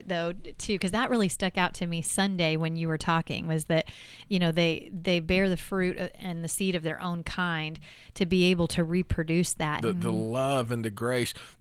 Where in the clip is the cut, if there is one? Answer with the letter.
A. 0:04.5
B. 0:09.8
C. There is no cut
B